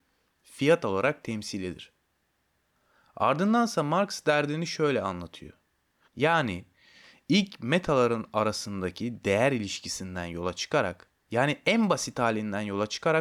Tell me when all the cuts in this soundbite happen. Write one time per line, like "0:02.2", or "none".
0:06.1
0:11.2